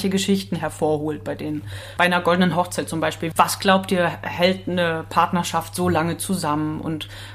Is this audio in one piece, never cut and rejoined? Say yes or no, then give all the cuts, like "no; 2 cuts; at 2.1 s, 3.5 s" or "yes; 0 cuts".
no; 1 cut; at 3.3 s